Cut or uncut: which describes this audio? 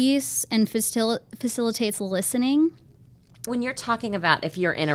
cut